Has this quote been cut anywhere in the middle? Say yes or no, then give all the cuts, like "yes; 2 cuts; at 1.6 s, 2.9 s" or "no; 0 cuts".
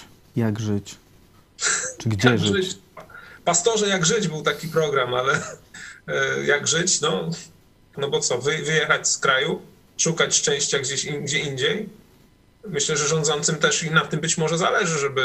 yes; 1 cut; at 7.9 s